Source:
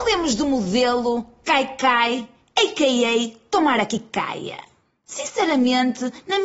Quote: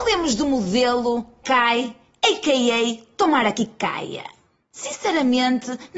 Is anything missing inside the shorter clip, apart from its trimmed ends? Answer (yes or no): yes